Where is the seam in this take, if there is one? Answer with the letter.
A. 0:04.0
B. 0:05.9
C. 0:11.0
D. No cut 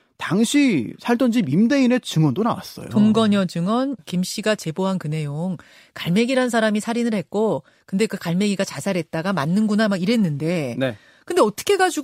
A